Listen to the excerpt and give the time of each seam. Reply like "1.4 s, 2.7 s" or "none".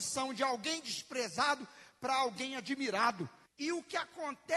3.5 s